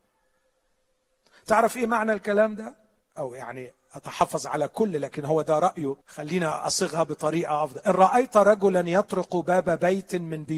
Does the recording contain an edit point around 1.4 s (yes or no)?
no